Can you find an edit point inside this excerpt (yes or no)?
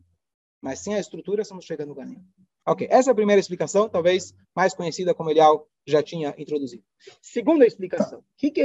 yes